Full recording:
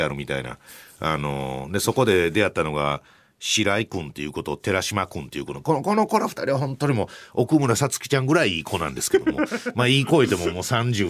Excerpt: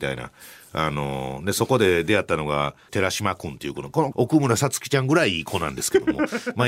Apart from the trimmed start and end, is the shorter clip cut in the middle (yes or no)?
yes